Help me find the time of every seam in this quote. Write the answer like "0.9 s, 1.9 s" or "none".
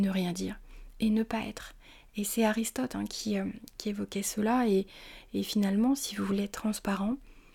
none

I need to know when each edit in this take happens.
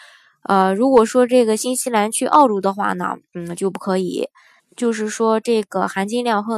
4.6 s

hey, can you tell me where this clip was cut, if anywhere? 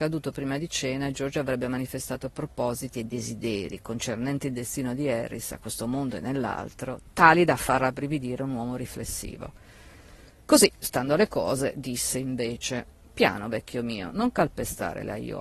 none

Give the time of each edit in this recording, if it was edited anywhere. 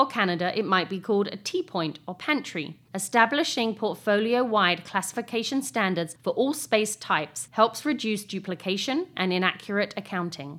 2.9 s, 9.1 s

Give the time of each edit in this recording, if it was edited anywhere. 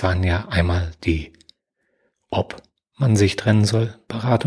none

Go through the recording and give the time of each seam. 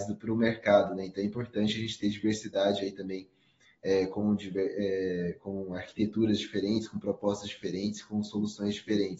none

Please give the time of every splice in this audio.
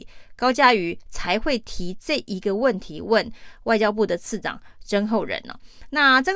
none

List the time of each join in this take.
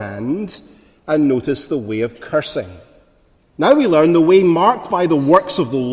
3.5 s

